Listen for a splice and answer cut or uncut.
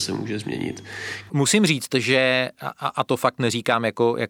cut